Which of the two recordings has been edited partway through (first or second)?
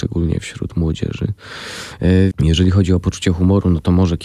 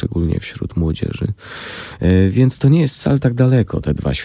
first